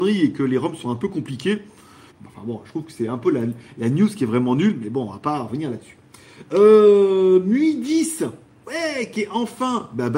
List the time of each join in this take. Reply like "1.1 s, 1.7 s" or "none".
2.1 s